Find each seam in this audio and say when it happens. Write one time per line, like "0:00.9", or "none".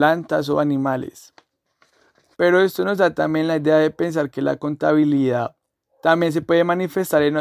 0:02.3

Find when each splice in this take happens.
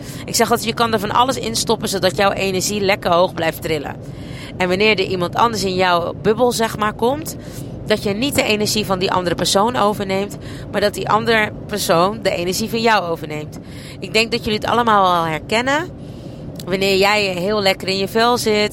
none

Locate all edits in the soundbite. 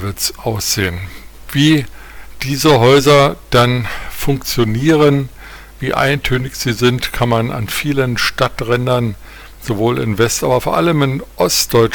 none

